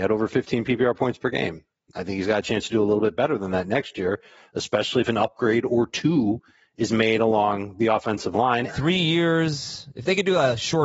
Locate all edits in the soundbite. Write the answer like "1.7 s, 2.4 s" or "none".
8.7 s